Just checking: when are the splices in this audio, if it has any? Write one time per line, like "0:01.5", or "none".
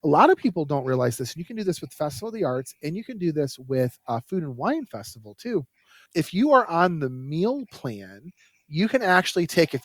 none